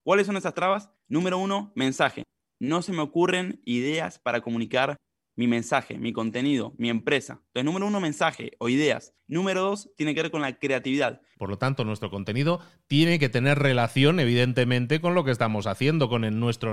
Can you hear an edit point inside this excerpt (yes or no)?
yes